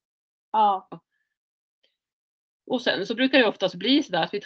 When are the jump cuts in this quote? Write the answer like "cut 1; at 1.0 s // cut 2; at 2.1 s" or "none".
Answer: cut 1; at 0.9 s